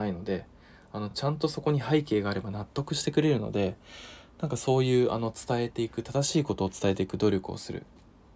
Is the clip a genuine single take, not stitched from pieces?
yes; 0 cuts

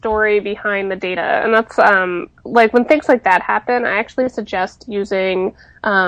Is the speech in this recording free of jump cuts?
yes; 0 cuts

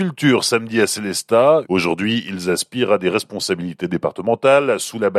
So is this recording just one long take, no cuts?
no; 1 cut; at 1.6 s

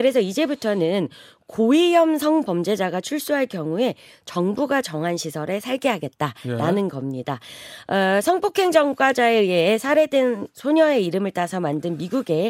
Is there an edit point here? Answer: no; 0 cuts

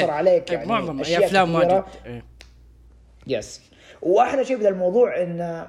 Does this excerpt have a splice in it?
no; 0 cuts

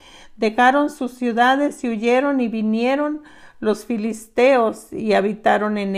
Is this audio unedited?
yes; 0 cuts

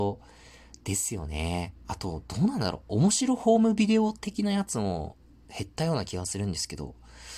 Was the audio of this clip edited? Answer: yes; 1 cut; at 1.8 s

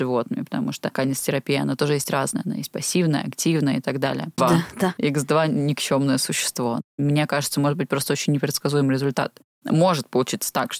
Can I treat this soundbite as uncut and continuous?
no; 1 cut; at 4.4 s

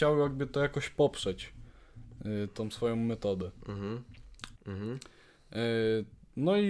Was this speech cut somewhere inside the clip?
yes; 1 cut; at 4.5 s

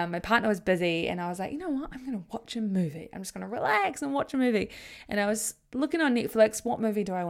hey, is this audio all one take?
yes; 0 cuts

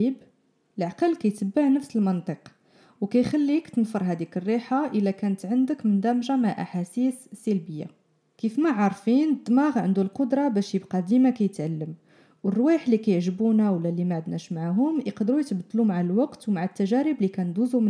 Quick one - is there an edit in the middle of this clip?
no; 0 cuts

